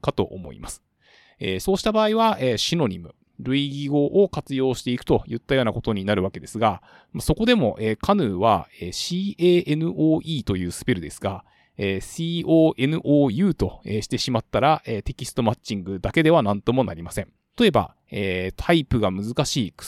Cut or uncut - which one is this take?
cut